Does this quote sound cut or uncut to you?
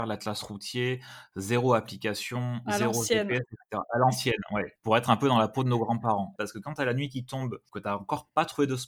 cut